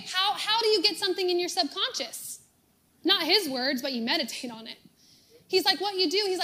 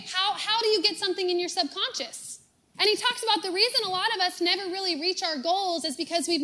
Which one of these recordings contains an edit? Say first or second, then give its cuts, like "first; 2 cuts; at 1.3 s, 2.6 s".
second; 1 cut; at 2.7 s